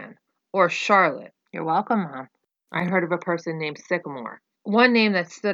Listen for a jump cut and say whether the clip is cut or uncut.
cut